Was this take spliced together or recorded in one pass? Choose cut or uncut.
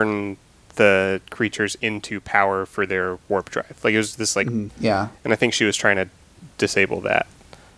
cut